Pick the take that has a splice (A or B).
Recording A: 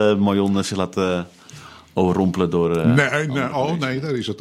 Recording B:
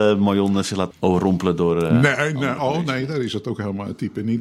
B